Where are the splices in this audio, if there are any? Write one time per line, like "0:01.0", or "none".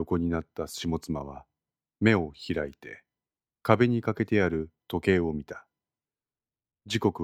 none